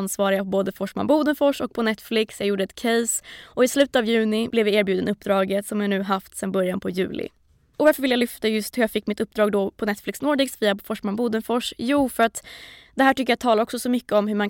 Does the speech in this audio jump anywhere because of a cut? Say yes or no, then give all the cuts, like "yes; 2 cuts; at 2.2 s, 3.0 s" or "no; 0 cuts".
no; 0 cuts